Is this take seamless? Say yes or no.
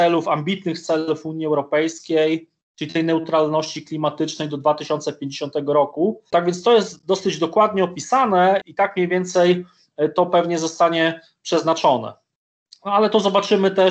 no